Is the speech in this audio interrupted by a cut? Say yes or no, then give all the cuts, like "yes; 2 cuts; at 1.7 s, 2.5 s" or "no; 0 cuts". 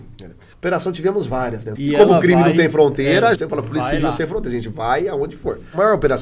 yes; 2 cuts; at 1.7 s, 3.3 s